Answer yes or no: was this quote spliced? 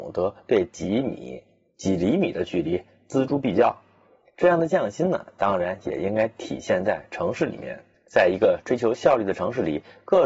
no